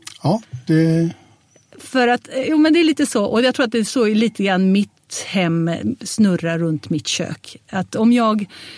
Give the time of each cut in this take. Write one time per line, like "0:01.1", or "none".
none